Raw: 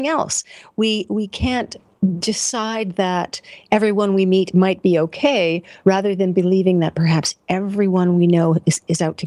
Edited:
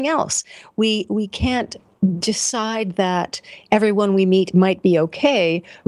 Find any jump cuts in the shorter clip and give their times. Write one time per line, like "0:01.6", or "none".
none